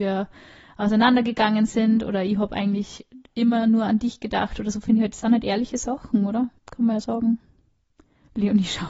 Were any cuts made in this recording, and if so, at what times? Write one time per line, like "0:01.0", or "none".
0:06.6